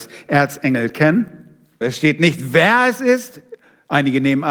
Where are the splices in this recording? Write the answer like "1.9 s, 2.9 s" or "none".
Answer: 1.8 s